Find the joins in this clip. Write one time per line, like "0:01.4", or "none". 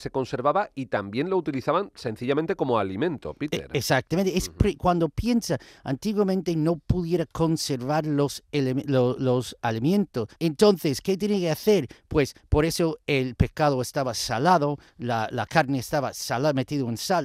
0:10.4